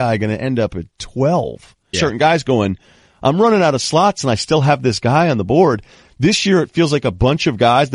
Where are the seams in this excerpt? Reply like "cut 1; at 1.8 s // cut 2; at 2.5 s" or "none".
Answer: cut 1; at 1.9 s